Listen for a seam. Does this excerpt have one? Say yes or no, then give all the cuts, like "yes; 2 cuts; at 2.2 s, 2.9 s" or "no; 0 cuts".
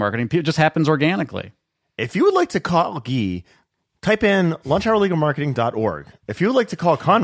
no; 0 cuts